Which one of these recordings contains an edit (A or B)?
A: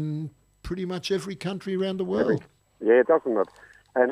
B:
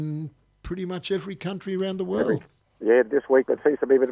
A